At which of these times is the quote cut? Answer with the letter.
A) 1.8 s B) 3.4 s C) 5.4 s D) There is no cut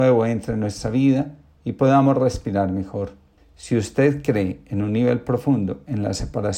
B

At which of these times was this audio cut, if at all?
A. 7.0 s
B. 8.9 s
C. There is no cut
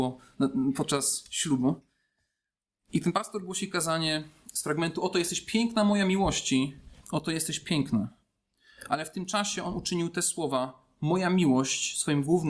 A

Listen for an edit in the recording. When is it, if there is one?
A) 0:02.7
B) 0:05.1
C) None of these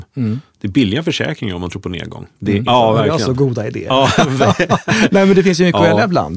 A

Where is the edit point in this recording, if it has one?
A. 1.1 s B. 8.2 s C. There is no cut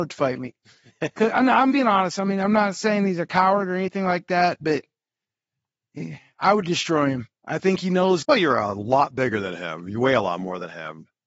B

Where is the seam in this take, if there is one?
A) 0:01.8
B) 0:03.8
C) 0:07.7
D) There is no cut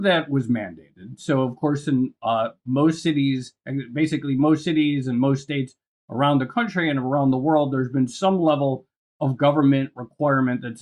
D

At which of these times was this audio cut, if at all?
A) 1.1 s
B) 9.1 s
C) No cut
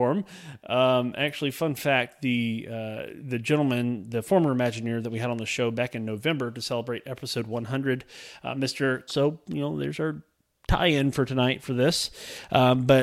B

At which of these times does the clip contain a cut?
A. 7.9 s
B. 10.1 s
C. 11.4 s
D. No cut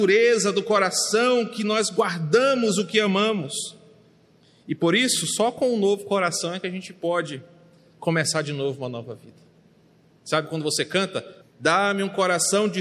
C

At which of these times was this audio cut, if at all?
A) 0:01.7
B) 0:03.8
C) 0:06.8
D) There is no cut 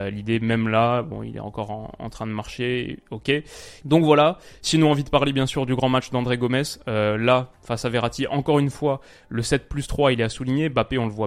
B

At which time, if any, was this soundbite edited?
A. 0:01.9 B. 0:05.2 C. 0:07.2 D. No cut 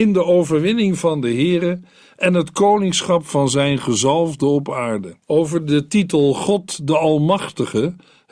B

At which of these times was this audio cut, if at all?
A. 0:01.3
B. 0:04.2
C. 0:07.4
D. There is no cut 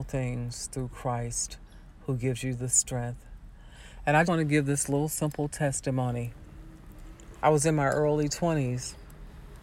B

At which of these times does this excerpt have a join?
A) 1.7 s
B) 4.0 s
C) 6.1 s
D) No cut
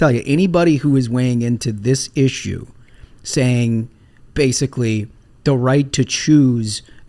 D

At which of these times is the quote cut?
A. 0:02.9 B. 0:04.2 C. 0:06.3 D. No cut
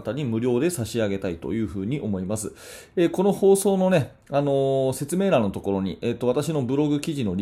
D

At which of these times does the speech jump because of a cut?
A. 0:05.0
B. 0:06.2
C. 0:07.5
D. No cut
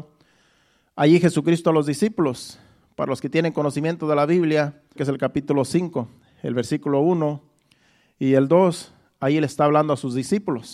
A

